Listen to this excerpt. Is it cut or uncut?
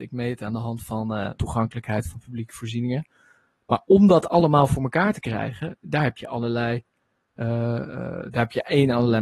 cut